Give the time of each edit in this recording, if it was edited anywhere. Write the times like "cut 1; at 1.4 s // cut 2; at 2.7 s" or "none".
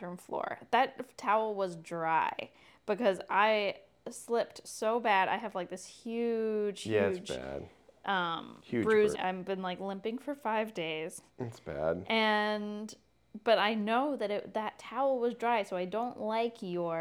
cut 1; at 9.1 s